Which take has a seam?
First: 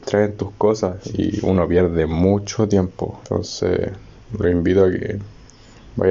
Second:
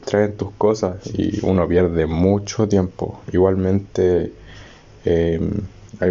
first; 1 cut; at 3.2 s

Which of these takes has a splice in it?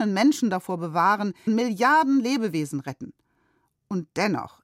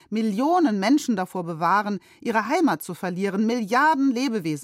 first; 1 cut; at 1.5 s

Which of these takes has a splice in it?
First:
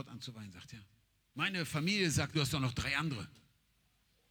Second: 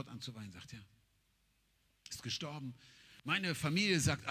first; 2 cuts; at 1.3 s, 2.3 s

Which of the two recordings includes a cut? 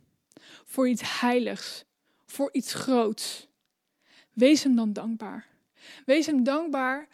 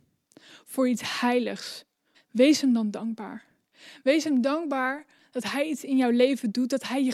second; 1 cut; at 2.1 s

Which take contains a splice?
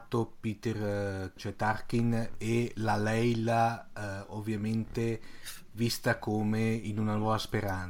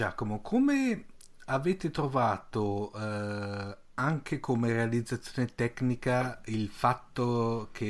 first; 1 cut; at 1.4 s

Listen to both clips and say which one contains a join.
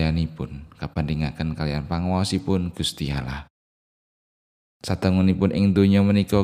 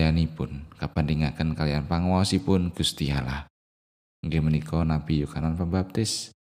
second; 1 cut; at 4.1 s

